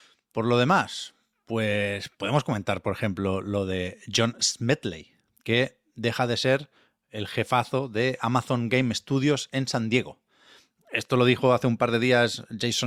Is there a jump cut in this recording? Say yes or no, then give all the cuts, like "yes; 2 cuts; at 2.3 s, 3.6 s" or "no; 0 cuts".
no; 0 cuts